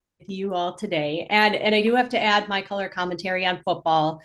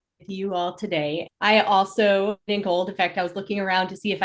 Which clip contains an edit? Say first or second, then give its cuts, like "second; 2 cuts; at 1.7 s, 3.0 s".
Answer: second; 2 cuts; at 1.3 s, 2.4 s